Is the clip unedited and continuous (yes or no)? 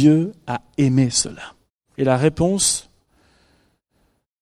no